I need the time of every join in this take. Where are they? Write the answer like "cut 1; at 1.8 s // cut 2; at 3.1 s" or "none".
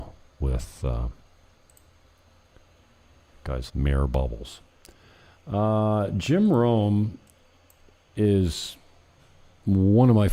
cut 1; at 3.7 s